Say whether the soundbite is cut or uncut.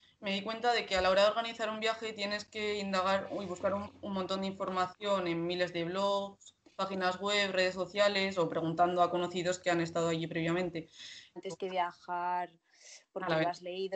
cut